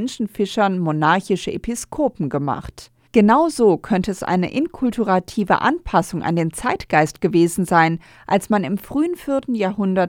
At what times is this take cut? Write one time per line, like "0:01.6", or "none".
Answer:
0:03.1